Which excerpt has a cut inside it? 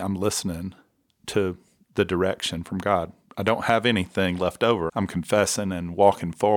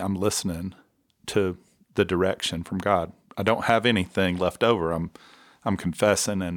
first; 1 cut; at 4.9 s

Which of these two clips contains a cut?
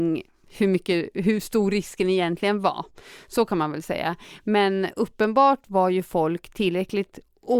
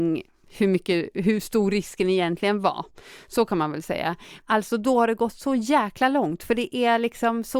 second; 1 cut; at 4.4 s

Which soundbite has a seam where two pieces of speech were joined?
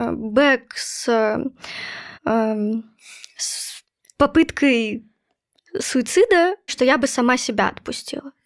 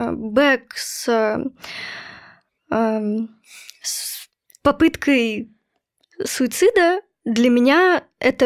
first; 2 cuts; at 2.1 s, 6.7 s

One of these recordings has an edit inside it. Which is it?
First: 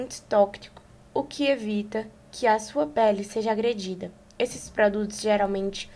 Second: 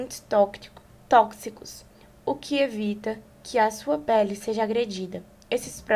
first; 1 cut; at 1.0 s

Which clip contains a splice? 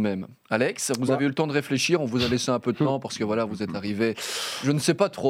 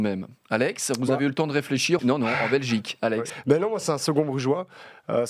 second; 2 cuts; at 2.0 s, 3.3 s

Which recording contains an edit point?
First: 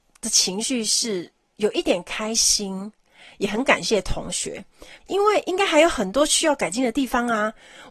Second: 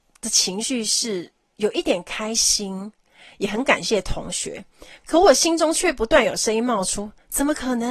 first; 1 cut; at 5.0 s

